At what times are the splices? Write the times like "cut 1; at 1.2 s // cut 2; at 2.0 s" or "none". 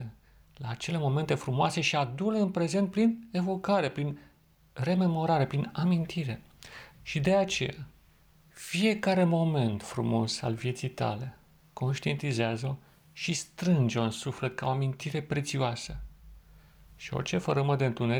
cut 1; at 6.9 s // cut 2; at 11.6 s